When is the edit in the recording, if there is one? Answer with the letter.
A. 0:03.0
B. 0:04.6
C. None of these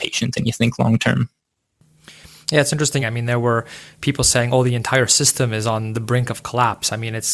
A